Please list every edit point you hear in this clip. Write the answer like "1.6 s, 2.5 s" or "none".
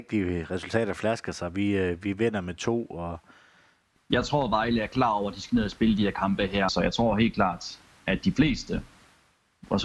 4.0 s, 6.7 s